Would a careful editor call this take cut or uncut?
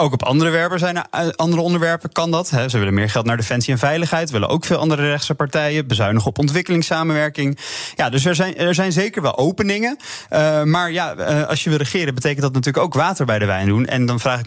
uncut